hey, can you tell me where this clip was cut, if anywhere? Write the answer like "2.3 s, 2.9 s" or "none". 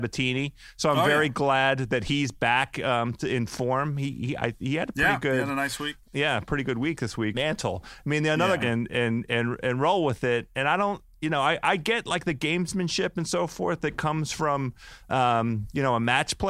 6.0 s, 7.3 s, 8.6 s